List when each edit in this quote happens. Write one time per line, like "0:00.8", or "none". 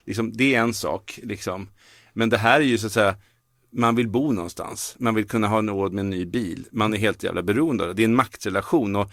none